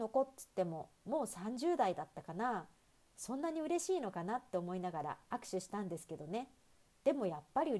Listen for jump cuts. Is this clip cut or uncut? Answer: uncut